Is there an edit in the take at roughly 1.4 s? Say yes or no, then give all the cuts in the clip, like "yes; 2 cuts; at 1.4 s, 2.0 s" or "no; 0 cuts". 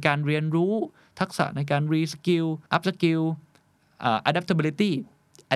no; 1 cut; at 2.7 s